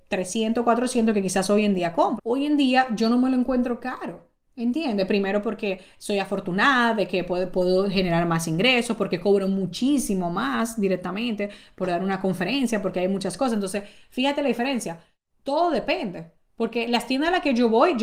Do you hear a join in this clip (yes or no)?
yes